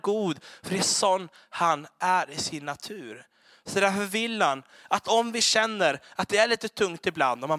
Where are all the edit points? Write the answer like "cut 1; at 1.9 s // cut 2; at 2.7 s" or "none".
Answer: none